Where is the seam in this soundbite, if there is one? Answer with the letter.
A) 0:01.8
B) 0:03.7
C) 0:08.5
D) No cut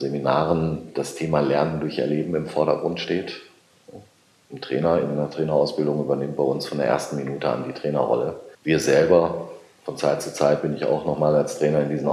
C